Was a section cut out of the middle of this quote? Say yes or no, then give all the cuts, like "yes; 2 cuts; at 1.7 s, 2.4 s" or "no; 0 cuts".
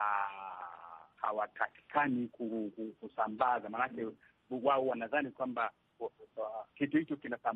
yes; 1 cut; at 6.0 s